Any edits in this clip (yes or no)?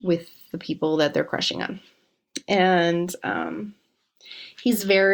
no